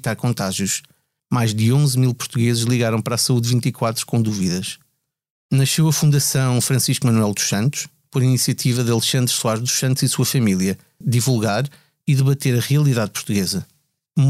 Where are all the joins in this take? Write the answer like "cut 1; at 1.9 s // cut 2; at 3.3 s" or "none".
cut 1; at 1.2 s // cut 2; at 11.0 s